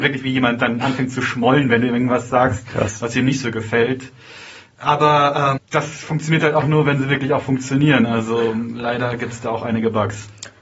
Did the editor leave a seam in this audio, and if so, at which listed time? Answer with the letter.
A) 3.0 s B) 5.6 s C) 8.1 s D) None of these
B